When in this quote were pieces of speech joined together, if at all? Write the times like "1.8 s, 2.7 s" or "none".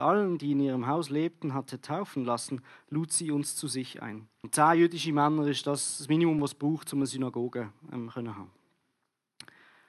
4.4 s